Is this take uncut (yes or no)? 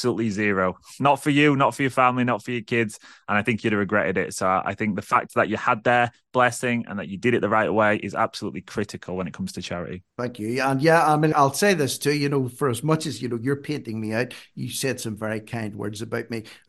no